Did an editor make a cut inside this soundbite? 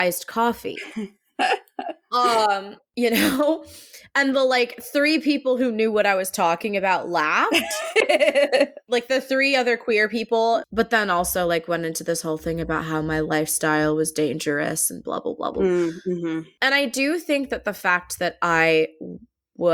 yes; 1 cut; at 10.6 s

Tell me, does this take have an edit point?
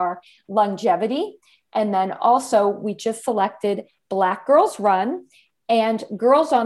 no; 0 cuts

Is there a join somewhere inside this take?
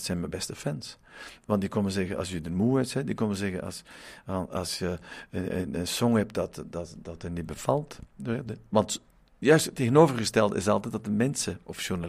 no; 0 cuts

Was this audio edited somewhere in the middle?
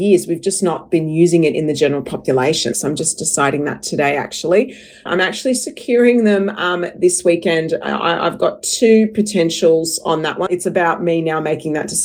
yes; 3 cuts; at 2.7 s, 5.1 s, 10.5 s

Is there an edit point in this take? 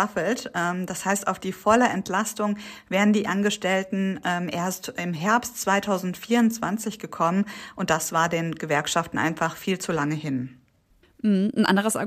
no; 0 cuts

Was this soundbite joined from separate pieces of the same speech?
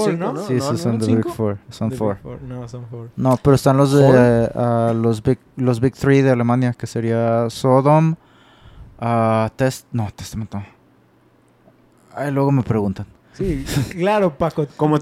no; 0 cuts

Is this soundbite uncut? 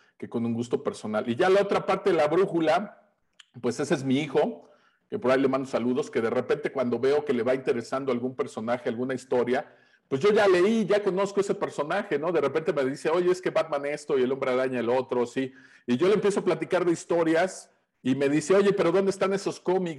yes; 0 cuts

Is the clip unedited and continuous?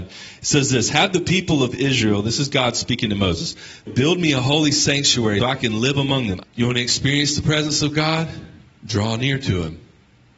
no; 3 cuts; at 3.9 s, 5.4 s, 6.4 s

